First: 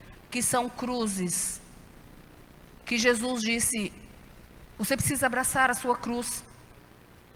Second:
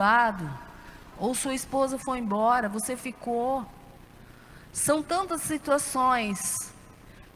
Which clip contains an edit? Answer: second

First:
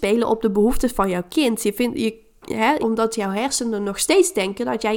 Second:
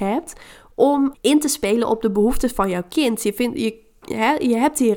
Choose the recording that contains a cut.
first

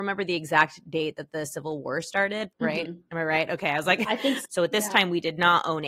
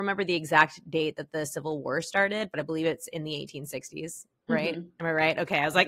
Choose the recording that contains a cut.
first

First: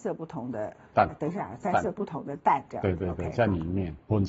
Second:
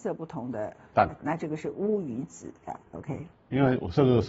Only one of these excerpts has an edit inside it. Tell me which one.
second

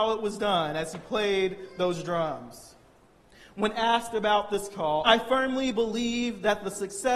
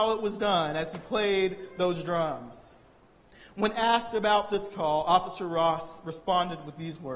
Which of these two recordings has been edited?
first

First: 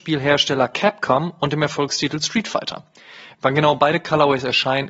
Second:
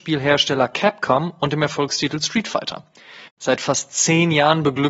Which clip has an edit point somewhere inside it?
second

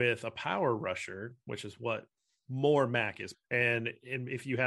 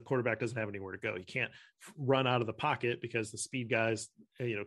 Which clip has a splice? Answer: first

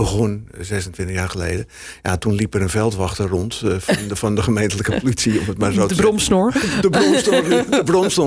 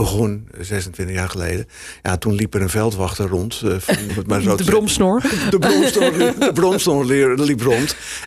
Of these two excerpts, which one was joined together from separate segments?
second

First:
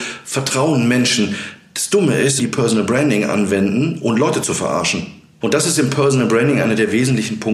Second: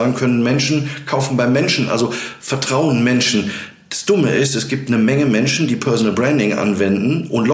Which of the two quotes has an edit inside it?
first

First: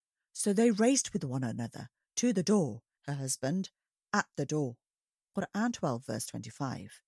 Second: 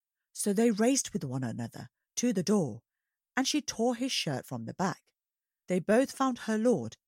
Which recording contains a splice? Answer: first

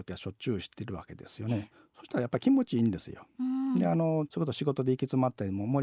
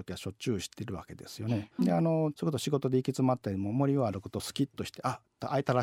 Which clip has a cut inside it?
second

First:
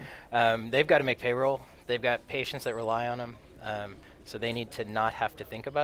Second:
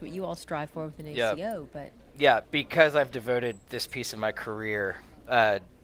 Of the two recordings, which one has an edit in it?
second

